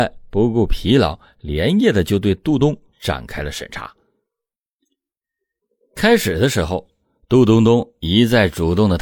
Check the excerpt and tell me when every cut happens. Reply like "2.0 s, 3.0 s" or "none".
2.6 s